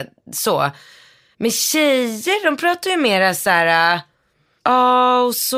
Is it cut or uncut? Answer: uncut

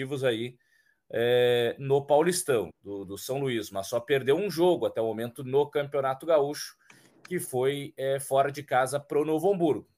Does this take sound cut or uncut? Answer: cut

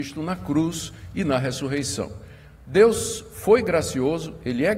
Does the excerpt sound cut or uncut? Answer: uncut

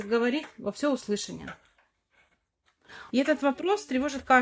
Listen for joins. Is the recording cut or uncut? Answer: cut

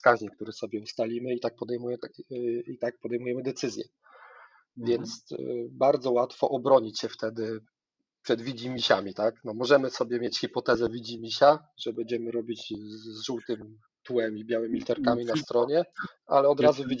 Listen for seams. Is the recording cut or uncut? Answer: uncut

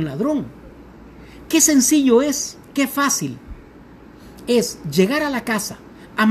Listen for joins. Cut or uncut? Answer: cut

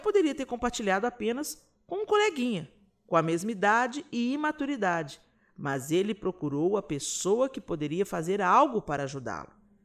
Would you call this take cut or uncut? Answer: uncut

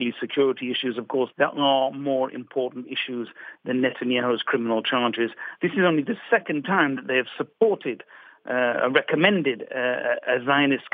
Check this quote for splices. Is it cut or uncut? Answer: cut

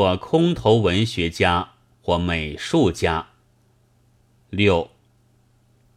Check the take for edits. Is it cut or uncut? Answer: uncut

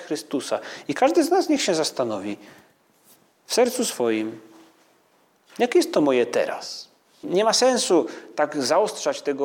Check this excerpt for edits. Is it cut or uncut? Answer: cut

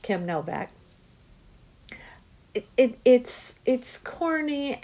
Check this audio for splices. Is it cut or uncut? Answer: uncut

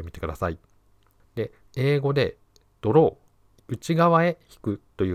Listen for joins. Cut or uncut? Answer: cut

